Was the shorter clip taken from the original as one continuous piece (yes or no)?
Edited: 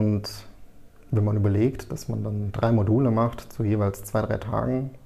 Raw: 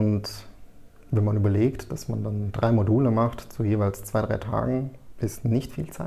yes